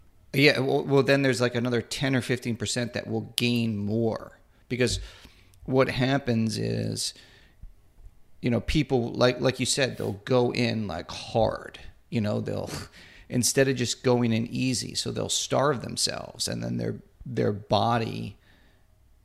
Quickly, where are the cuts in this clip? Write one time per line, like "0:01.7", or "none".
none